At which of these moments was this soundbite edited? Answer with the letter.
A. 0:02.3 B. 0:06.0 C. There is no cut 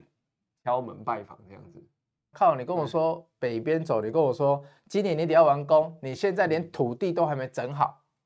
A